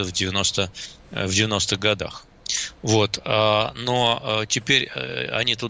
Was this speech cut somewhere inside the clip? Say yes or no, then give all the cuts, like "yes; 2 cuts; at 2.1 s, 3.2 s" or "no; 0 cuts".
no; 0 cuts